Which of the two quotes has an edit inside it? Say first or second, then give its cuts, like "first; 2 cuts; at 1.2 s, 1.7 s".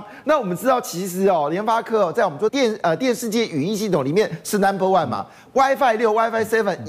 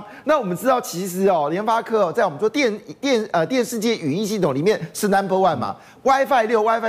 first; 1 cut; at 2.5 s